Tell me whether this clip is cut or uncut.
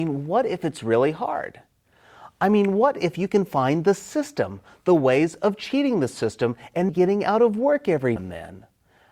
cut